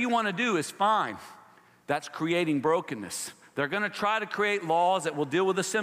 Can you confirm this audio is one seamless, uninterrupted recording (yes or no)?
yes